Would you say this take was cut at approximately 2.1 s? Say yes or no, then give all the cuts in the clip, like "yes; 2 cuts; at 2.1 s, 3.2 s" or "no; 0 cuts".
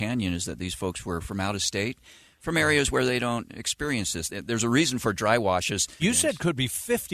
no; 2 cuts; at 4.3 s, 6.0 s